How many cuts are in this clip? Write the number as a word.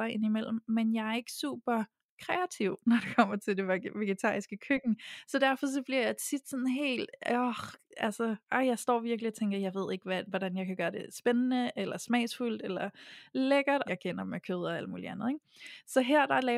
two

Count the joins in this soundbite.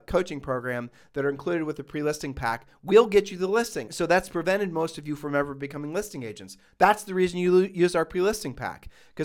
one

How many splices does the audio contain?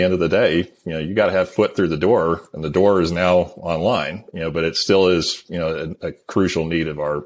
zero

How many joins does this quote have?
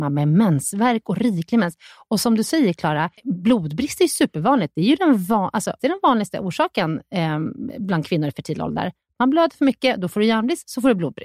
two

